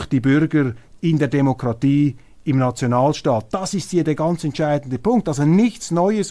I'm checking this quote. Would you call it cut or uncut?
uncut